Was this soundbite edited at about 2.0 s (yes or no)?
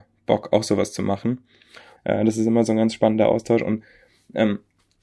yes